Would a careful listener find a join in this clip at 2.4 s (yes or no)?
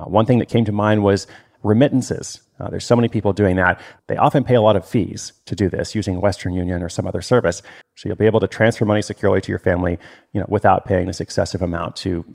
yes